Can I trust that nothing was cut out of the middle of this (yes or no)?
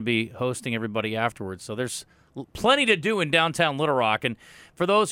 yes